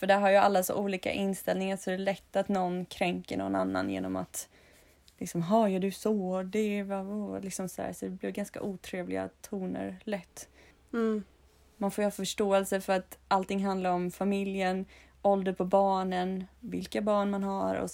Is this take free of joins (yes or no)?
yes